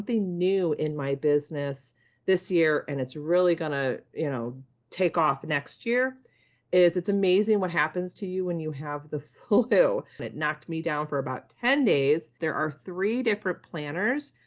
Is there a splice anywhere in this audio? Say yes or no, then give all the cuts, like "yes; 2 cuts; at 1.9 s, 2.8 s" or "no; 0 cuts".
yes; 2 cuts; at 10.2 s, 12.4 s